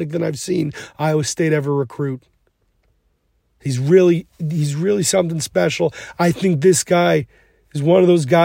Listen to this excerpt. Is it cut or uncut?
uncut